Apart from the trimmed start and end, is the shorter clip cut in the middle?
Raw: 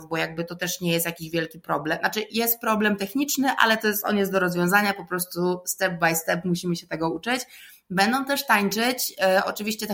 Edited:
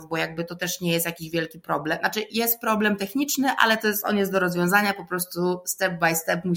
no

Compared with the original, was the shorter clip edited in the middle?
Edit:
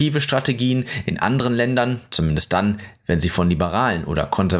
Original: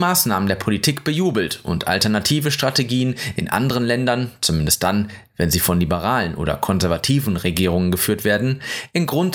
no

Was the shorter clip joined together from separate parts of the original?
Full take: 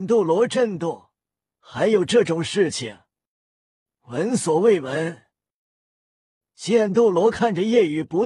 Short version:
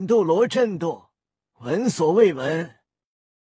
yes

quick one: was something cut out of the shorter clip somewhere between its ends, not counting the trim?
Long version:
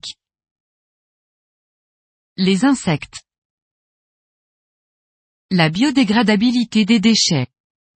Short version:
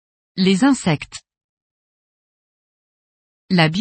no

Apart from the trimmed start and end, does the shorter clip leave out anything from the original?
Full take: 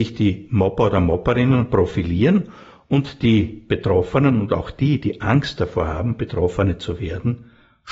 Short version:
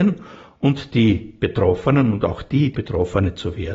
yes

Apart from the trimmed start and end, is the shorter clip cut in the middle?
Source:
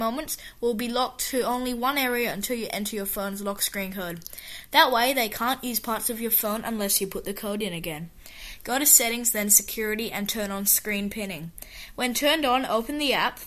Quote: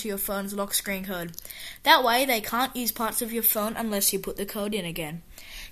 no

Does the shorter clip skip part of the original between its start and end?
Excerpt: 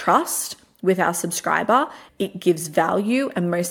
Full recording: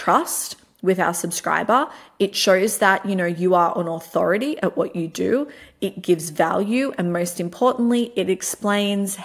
yes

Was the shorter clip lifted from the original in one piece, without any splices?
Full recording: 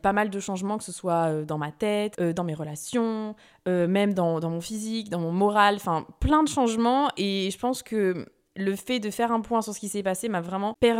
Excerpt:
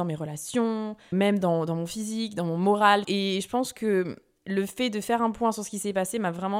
no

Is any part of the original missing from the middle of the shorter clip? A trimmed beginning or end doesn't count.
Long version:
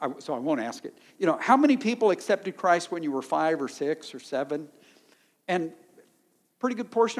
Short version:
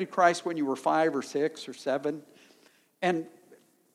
no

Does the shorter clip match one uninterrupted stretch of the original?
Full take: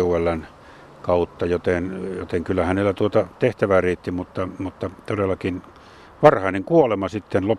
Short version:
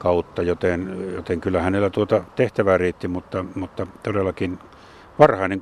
yes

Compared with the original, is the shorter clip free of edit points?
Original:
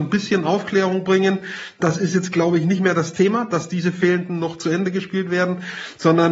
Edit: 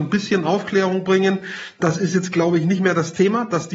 yes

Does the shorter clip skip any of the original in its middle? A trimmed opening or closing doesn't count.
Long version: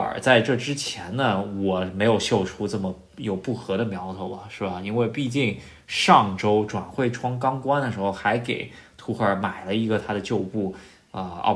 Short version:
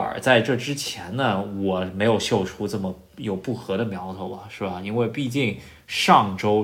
no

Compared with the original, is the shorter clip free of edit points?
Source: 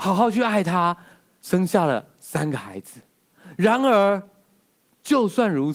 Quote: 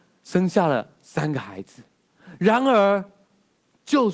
yes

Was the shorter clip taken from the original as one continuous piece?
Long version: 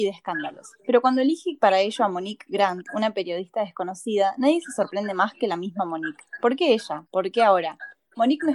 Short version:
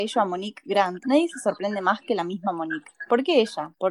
no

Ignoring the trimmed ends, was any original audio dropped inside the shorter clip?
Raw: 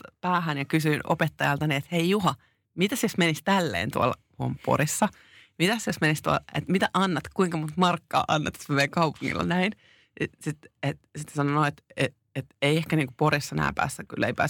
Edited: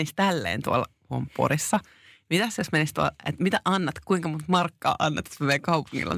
no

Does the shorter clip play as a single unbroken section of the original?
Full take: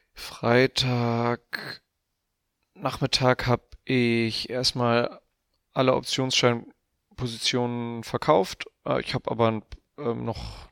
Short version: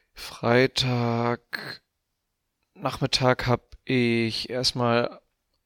yes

